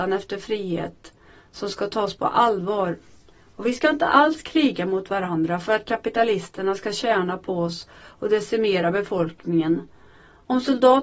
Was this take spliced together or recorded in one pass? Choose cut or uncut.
uncut